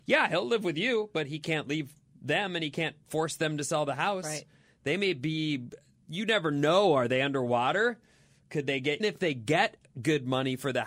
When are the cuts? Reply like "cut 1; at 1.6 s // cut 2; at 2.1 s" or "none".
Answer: cut 1; at 9.0 s

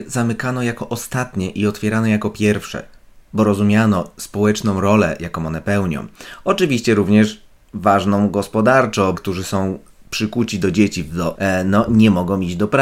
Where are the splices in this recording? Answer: cut 1; at 9.2 s // cut 2; at 11.4 s

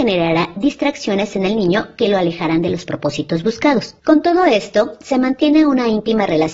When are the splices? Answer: cut 1; at 4.0 s

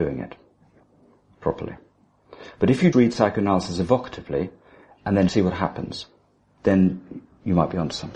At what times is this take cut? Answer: cut 1; at 2.9 s // cut 2; at 5.3 s

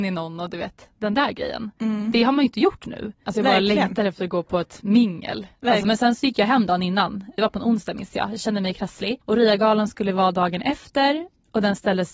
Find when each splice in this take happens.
cut 1; at 3.2 s // cut 2; at 5.8 s

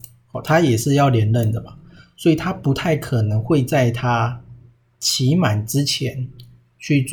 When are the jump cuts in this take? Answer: none

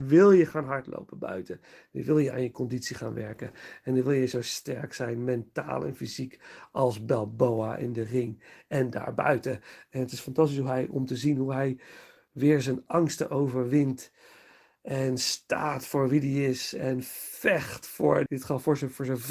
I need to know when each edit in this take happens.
cut 1; at 18.3 s

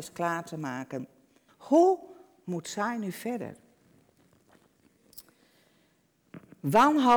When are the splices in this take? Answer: cut 1; at 1.5 s

